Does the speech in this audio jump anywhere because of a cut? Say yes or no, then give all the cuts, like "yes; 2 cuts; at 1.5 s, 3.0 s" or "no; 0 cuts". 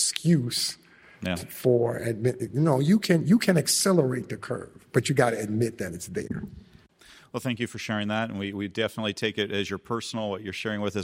no; 0 cuts